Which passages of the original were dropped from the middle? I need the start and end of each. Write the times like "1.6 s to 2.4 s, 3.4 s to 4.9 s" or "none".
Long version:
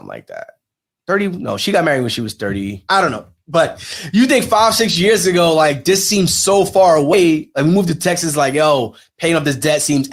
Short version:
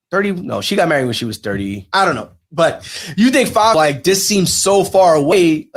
4.7 s to 5.6 s